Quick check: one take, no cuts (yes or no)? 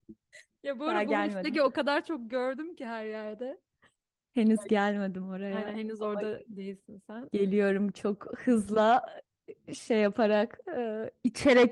yes